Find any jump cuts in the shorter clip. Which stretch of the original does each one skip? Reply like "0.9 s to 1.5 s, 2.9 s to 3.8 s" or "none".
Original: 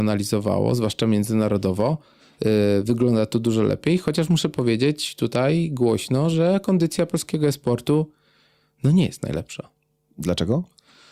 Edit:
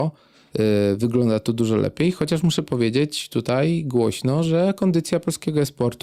none